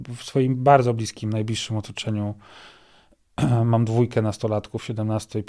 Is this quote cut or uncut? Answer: uncut